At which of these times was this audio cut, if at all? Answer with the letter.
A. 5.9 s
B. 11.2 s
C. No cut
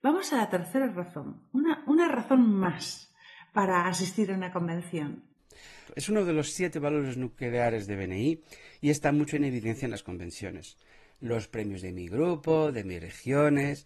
A